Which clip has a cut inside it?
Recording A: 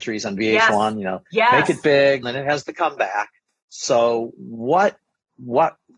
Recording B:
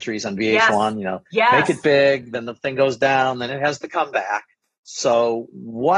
A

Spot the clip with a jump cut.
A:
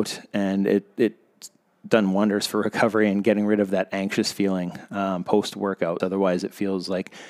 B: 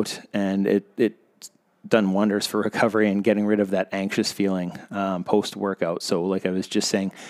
A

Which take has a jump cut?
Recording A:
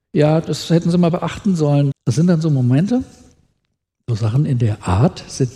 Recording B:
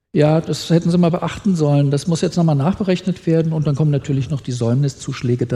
A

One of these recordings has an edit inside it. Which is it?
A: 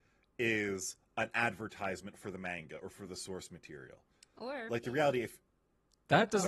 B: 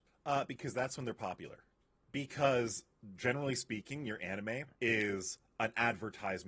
B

